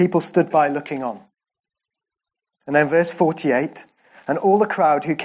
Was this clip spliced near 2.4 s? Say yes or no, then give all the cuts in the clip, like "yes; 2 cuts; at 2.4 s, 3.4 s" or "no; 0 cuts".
no; 0 cuts